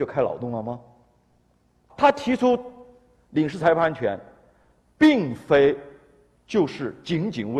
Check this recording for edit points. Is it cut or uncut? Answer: cut